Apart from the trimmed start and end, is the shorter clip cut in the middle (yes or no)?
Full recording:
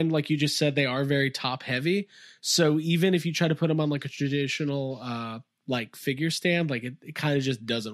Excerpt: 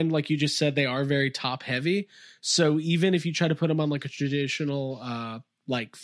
no